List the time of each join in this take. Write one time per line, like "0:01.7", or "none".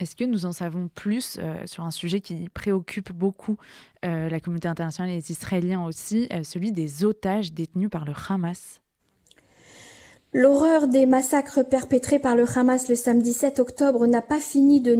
none